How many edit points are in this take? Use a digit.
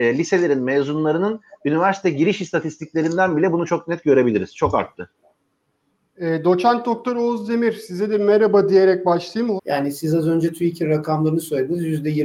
1